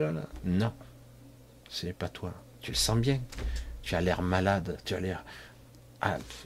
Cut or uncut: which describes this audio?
uncut